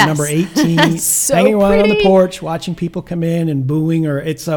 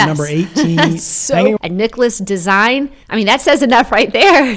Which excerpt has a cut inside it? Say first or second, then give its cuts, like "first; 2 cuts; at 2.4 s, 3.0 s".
second; 2 cuts; at 1.6 s, 3.0 s